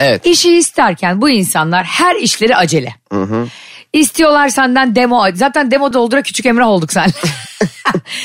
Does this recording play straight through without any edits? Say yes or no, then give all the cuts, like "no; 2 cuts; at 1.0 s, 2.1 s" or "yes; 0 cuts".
no; 1 cut; at 5.9 s